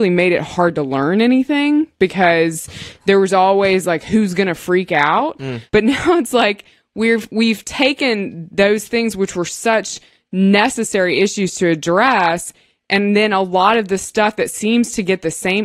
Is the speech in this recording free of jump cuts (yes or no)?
no